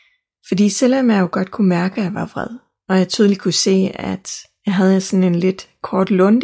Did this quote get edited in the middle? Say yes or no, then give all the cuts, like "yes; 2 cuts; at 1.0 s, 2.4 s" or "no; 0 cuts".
no; 0 cuts